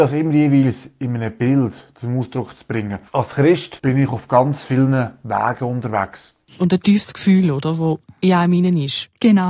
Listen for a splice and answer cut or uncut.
cut